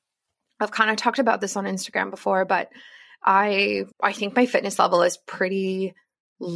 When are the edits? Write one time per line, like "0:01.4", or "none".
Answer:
0:03.9